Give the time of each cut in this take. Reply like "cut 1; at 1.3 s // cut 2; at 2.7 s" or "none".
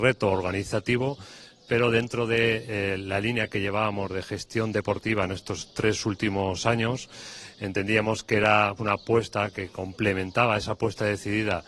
cut 1; at 8.8 s